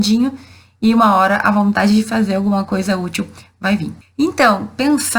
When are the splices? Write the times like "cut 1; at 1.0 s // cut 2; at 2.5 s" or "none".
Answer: cut 1; at 4.0 s